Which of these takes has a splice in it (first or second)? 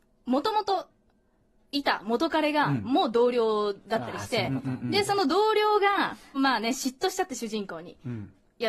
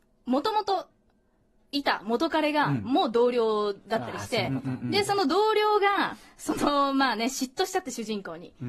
first